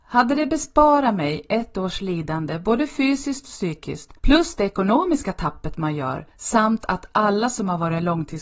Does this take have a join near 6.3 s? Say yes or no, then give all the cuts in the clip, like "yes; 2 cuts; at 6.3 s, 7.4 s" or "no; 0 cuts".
yes; 2 cuts; at 4.2 s, 6.3 s